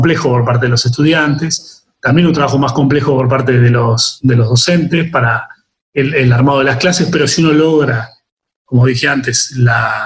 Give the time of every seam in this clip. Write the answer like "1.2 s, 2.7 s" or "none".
none